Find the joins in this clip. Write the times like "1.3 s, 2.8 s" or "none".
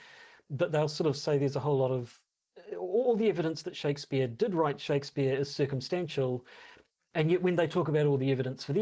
none